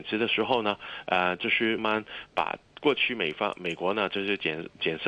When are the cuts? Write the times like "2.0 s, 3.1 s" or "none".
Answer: 1.8 s